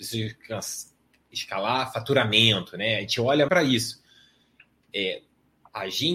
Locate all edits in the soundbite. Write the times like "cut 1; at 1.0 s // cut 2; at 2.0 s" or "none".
cut 1; at 3.5 s